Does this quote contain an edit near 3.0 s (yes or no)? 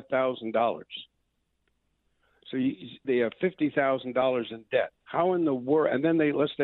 yes